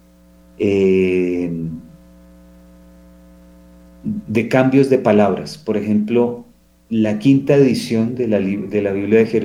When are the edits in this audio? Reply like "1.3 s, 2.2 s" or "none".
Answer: none